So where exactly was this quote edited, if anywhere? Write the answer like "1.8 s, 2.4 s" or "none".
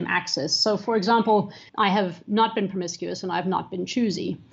1.7 s